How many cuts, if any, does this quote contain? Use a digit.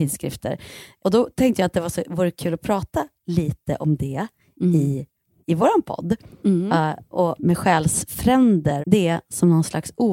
2